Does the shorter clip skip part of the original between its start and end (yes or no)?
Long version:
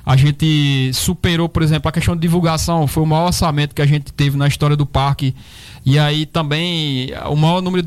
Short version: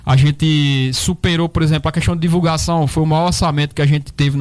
no